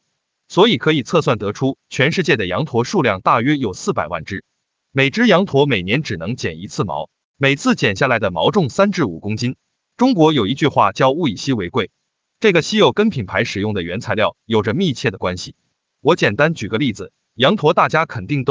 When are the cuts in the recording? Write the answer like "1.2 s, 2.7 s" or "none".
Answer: 9.9 s